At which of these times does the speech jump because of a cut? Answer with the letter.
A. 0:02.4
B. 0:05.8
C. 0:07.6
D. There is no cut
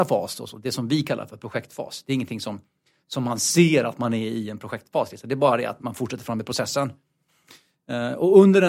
B